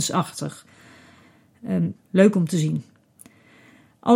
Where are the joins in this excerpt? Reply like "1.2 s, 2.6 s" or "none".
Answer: 2.0 s